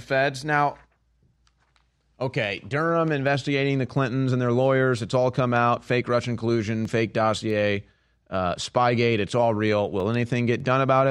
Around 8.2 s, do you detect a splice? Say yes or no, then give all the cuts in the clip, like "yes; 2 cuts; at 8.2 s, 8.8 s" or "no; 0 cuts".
no; 0 cuts